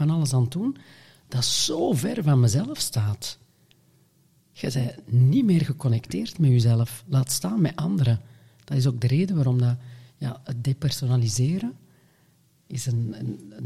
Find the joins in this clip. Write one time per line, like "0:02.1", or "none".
none